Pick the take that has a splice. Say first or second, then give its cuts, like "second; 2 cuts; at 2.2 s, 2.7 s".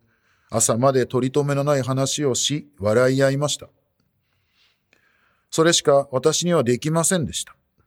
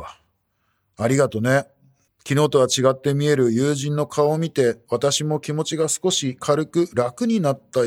second; 1 cut; at 2.1 s